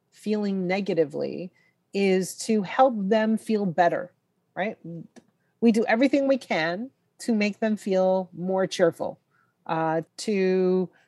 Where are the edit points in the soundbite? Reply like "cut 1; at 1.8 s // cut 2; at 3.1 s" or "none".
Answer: cut 1; at 10.0 s